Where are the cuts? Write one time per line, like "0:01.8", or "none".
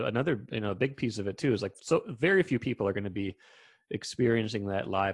none